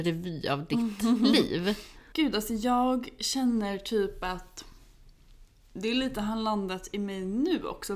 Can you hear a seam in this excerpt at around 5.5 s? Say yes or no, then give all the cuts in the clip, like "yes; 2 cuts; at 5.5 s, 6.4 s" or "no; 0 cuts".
no; 1 cut; at 2.1 s